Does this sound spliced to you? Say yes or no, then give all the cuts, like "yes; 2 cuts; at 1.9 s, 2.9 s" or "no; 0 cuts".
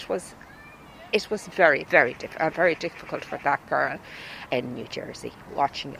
yes; 2 cuts; at 1.8 s, 4.5 s